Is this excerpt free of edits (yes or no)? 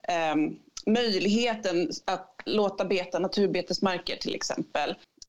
no